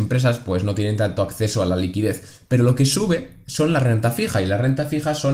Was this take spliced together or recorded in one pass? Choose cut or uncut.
uncut